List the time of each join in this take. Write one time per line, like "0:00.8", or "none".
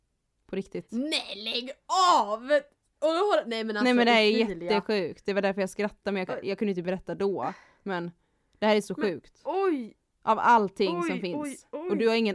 0:06.3